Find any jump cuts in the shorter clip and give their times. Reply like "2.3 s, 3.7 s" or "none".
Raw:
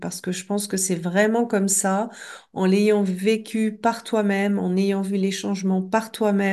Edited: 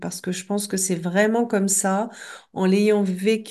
none

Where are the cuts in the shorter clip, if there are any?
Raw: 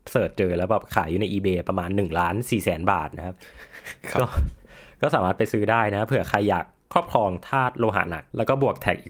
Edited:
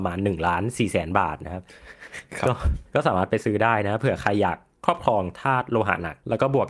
2.9 s

